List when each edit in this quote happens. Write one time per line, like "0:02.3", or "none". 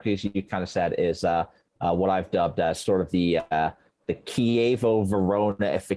none